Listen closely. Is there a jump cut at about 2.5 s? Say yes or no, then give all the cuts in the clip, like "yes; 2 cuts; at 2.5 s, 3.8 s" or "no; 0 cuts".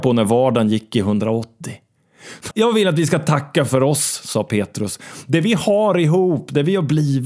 yes; 1 cut; at 2.5 s